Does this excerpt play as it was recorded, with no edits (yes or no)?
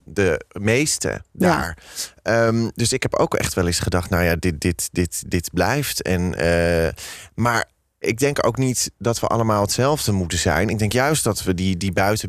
yes